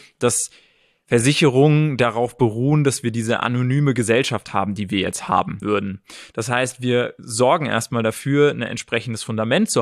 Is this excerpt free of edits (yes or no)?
no